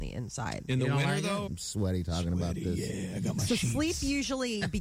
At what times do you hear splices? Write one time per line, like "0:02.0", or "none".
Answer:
0:01.5